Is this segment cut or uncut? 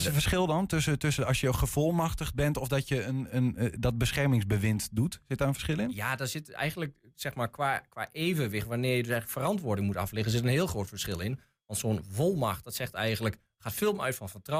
uncut